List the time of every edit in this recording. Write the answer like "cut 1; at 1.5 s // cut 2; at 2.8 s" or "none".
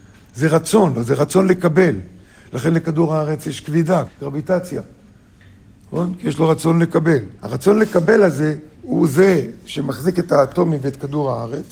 cut 1; at 4.1 s // cut 2; at 7.4 s // cut 3; at 8.7 s